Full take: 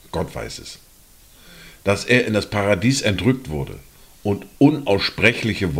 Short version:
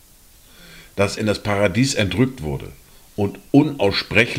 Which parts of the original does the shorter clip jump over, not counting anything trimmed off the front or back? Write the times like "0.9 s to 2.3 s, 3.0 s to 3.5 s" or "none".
2.1 s to 2.2 s

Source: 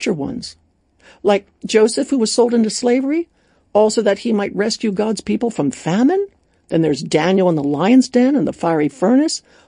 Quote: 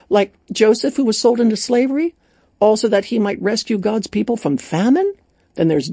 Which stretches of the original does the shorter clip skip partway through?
none

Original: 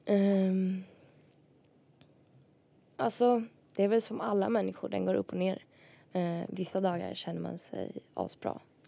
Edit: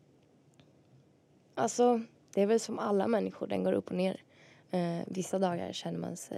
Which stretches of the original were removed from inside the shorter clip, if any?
none

